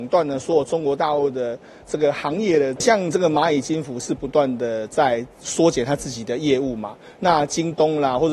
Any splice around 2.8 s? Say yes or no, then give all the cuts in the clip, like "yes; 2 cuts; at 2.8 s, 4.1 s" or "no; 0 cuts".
yes; 1 cut; at 2.8 s